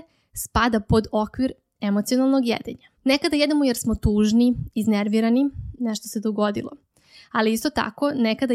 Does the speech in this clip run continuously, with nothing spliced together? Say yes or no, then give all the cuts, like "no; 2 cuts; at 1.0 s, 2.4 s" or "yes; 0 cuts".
no; 2 cuts; at 2.9 s, 5.8 s